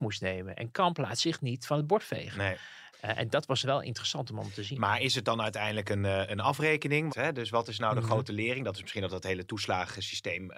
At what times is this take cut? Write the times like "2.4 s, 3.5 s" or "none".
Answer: 7.1 s